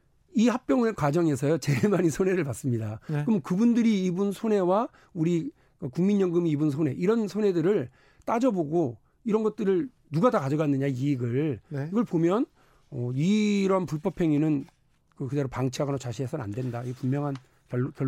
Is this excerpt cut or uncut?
uncut